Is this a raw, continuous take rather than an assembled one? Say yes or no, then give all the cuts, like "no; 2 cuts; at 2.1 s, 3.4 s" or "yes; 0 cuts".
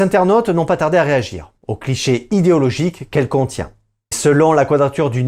no; 1 cut; at 4.1 s